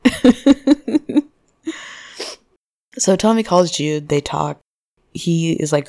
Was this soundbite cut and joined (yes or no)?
no